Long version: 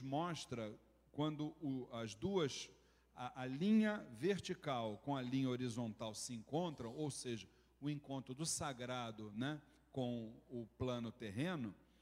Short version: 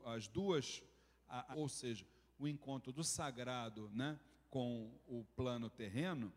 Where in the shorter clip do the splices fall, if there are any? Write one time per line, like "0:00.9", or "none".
0:01.5